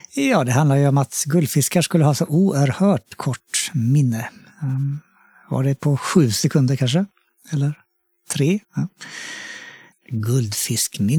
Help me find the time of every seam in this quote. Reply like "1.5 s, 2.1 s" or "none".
8.6 s, 9.9 s